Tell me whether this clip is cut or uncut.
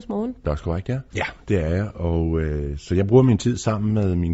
cut